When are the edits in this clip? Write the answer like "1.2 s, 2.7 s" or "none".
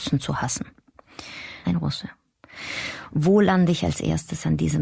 1.6 s